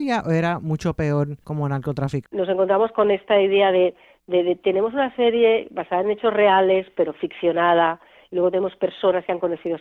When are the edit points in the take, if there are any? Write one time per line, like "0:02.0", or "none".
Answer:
0:02.2